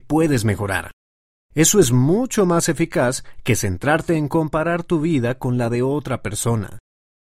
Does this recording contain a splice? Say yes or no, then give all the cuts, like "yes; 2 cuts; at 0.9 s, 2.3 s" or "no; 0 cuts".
no; 0 cuts